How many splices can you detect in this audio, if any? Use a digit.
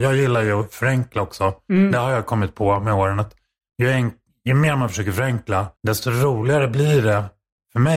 1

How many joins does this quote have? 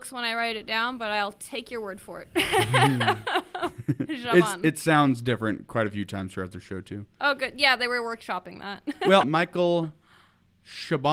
1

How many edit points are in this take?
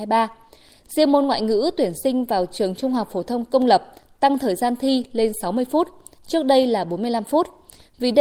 0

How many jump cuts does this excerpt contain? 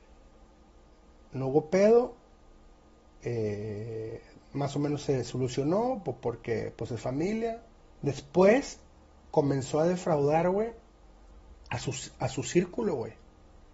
2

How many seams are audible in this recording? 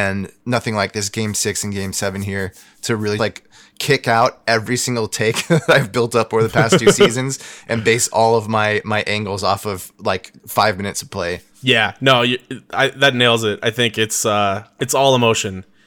2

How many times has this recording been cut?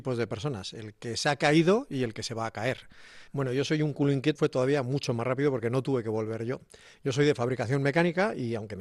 2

